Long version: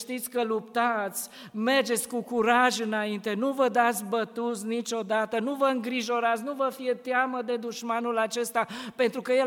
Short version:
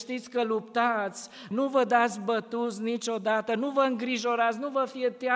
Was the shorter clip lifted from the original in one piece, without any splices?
no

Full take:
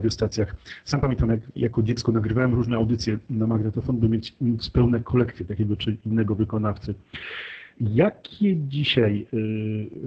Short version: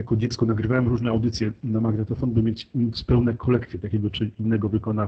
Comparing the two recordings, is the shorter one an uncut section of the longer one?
yes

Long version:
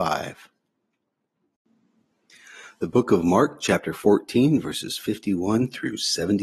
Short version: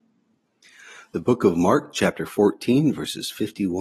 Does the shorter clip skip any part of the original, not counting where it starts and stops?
no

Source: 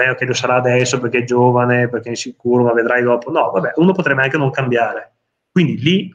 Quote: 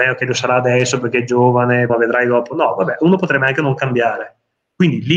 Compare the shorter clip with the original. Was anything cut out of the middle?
yes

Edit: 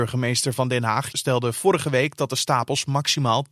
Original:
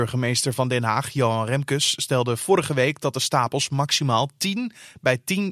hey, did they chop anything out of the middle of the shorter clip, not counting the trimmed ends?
yes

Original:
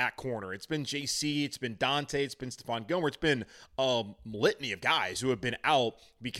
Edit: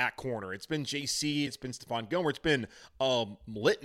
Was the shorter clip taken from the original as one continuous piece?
no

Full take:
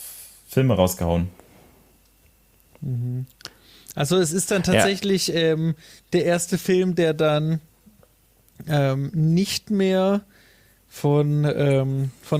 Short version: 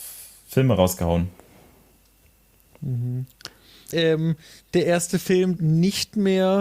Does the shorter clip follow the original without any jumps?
no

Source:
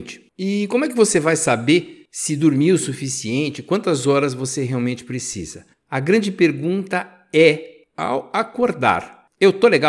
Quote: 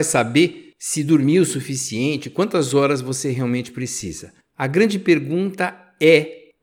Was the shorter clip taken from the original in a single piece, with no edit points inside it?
yes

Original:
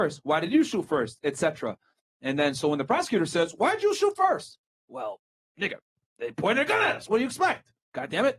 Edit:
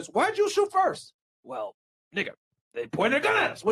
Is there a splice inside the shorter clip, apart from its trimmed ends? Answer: no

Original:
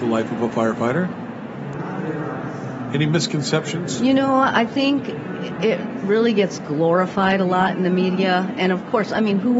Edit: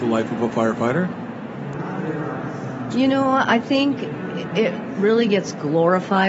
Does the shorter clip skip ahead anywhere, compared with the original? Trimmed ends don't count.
yes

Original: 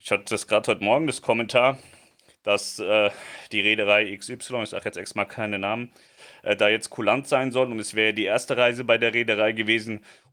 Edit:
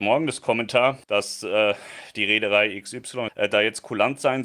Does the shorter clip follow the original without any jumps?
no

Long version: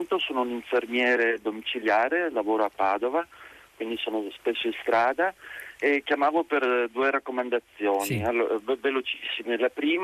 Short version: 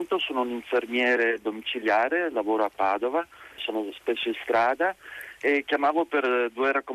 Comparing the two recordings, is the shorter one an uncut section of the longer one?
no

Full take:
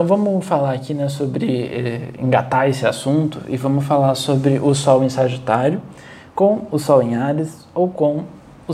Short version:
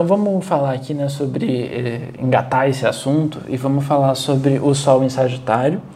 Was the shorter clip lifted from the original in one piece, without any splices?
yes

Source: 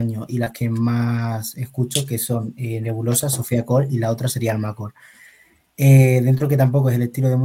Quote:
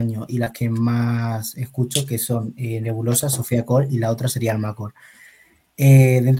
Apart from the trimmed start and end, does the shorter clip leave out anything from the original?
no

